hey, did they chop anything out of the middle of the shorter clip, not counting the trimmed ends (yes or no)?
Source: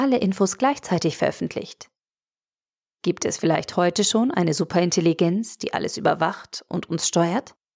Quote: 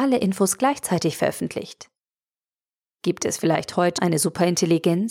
yes